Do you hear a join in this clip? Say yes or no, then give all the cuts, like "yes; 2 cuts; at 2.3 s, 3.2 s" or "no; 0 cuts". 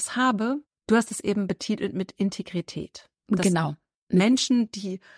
no; 0 cuts